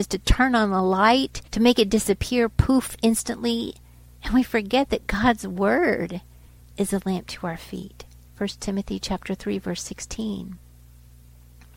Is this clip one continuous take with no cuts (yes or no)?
no